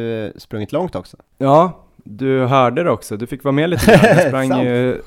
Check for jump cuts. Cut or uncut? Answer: uncut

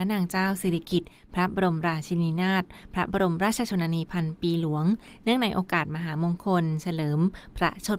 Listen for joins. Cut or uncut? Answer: uncut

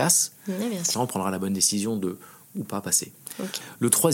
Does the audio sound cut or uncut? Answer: cut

